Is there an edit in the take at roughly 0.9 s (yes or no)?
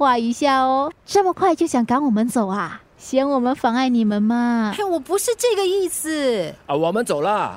yes